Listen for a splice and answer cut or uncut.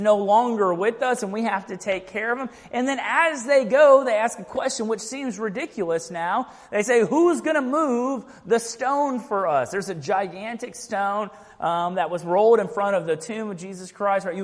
uncut